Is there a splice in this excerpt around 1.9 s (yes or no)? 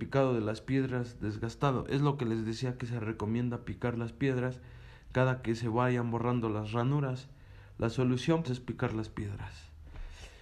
no